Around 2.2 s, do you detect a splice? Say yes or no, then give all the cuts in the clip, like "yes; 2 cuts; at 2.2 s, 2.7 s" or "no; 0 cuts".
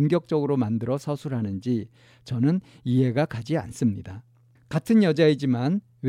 no; 1 cut; at 4.6 s